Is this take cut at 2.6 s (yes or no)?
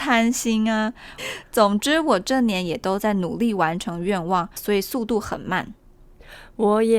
no